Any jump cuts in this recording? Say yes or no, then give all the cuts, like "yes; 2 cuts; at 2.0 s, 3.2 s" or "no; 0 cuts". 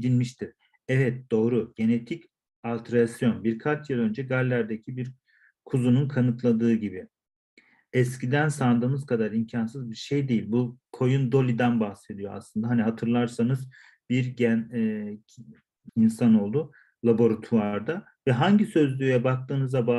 yes; 2 cuts; at 15.9 s, 18.2 s